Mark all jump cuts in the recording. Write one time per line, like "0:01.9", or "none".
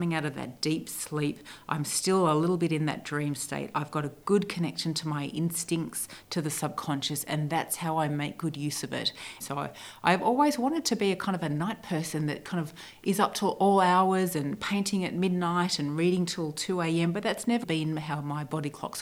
0:06.2
0:09.4
0:17.6

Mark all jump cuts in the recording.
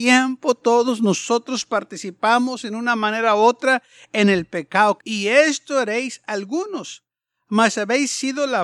0:05.0

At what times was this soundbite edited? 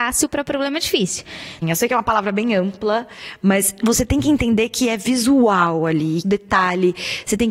0:01.6
0:06.2

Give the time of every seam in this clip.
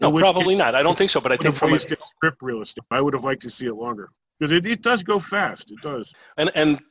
0:02.9

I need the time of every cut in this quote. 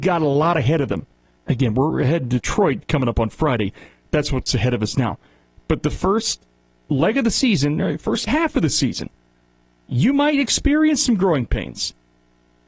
0:01.4
0:08.3

